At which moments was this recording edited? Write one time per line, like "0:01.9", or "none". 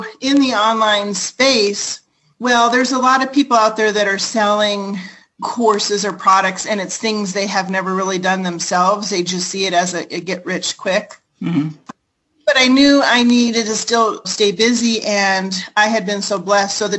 0:11.9
0:14.2